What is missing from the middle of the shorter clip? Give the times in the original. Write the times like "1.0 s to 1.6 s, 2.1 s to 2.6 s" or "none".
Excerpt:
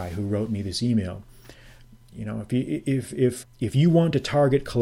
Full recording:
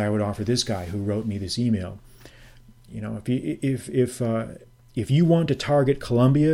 4.2 s to 4.8 s